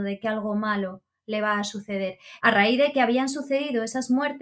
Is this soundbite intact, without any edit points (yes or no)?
no